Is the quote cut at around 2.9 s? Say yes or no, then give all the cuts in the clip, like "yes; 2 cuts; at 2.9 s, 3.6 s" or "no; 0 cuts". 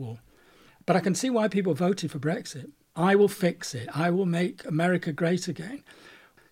yes; 1 cut; at 2.9 s